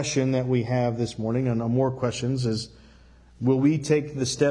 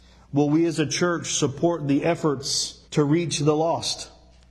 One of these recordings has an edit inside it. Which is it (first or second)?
second